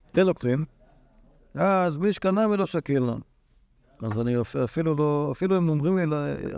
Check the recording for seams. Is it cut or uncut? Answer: uncut